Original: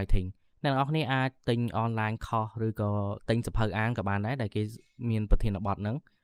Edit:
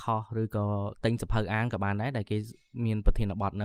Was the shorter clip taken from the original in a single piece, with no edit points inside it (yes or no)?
yes